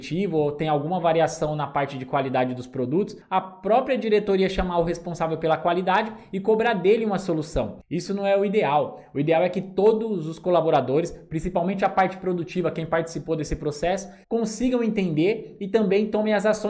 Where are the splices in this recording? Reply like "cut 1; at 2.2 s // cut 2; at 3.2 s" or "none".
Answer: cut 1; at 14.2 s